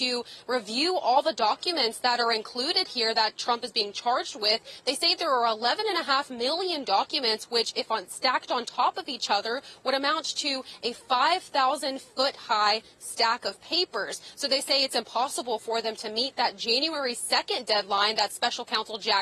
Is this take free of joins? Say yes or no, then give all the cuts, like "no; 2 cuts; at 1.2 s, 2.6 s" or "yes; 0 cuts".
yes; 0 cuts